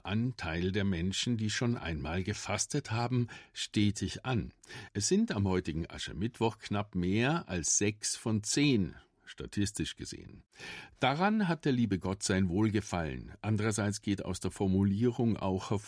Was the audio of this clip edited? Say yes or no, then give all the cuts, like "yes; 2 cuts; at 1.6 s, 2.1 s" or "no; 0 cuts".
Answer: no; 0 cuts